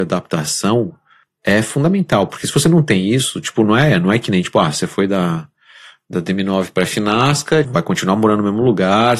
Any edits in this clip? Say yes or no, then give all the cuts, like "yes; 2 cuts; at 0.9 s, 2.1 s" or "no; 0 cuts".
yes; 1 cut; at 7.6 s